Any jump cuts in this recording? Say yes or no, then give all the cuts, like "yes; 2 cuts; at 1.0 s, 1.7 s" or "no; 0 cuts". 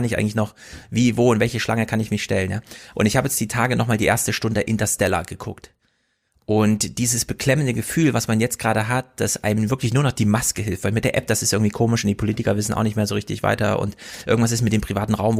yes; 1 cut; at 2.9 s